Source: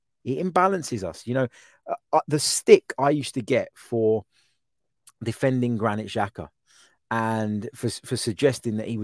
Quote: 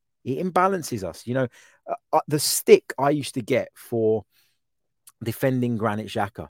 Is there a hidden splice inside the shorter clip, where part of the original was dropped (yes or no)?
no